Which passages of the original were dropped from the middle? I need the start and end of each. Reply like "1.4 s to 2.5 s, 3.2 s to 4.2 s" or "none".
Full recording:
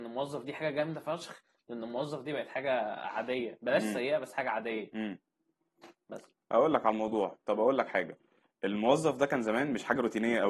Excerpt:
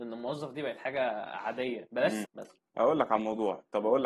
3.9 s to 6.0 s